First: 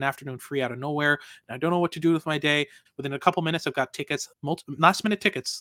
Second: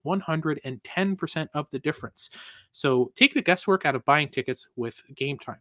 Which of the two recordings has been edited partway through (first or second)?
first